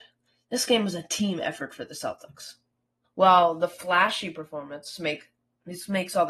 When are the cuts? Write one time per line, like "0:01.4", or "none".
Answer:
0:03.0